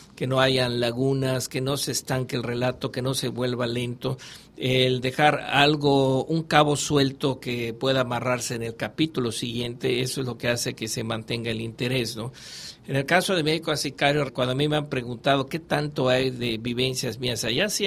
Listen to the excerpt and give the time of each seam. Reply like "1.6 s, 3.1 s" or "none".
14.3 s